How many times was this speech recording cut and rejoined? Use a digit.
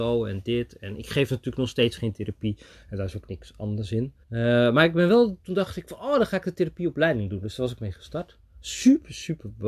1